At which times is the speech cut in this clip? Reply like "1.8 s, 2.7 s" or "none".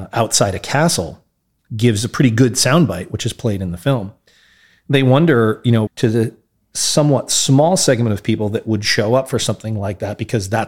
1.7 s, 5.9 s